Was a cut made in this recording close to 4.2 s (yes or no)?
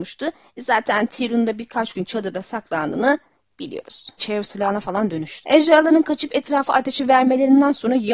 yes